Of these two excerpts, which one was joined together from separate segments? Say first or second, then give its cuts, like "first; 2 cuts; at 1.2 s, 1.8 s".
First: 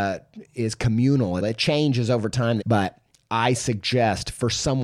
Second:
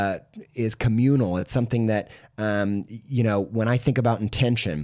first; 2 cuts; at 1.4 s, 2.6 s